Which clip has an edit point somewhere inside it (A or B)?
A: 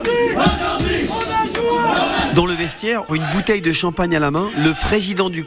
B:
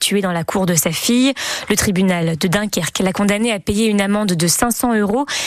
A